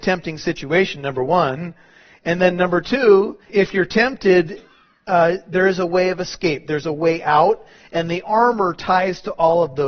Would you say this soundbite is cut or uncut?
cut